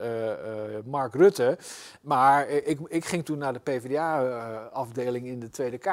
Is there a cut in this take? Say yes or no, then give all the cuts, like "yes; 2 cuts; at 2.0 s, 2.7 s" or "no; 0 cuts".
no; 0 cuts